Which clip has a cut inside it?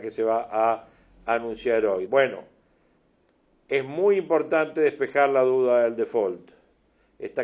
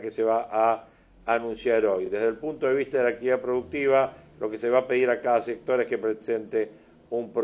first; 1 cut; at 2.1 s

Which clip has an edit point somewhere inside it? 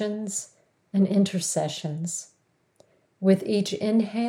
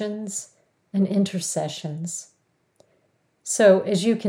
first; 1 cut; at 3.0 s

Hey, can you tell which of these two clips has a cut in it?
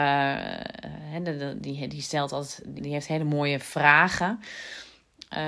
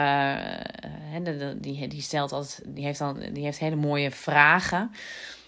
first; 1 cut; at 2.8 s

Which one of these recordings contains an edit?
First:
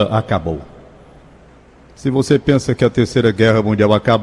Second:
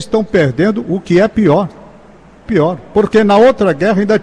second; 1 cut; at 2.5 s

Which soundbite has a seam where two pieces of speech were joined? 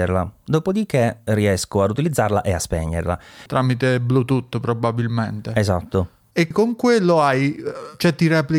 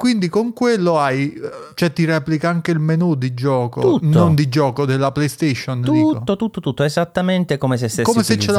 first; 2 cuts; at 3.5 s, 6.5 s

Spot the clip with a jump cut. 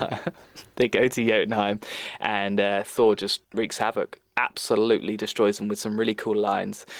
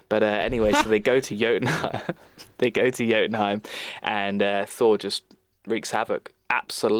first; 1 cut; at 3.4 s

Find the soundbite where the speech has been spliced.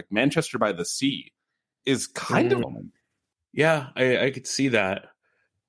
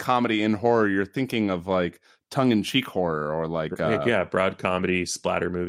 first; 1 cut; at 2.6 s

